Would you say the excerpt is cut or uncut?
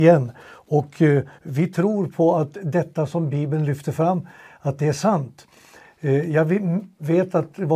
uncut